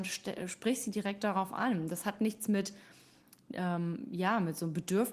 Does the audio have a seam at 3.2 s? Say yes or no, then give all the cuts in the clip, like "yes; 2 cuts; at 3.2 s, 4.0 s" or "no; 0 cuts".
no; 0 cuts